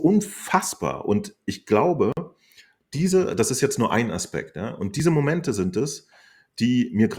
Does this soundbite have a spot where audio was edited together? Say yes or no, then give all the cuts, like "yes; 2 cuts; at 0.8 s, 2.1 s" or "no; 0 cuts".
no; 0 cuts